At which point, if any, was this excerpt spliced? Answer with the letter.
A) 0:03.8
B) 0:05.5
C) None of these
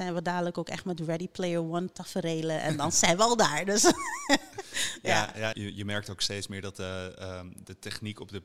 B